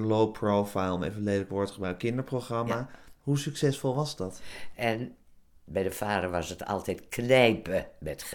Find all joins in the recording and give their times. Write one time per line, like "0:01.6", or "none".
0:03.2
0:04.7